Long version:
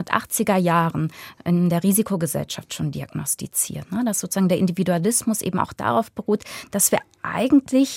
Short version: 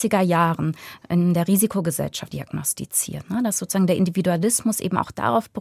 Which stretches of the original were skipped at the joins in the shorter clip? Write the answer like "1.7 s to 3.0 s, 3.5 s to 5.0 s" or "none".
2.7 s to 2.9 s